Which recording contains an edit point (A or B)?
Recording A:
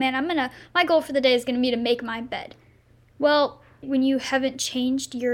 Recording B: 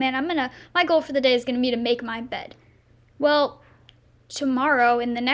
A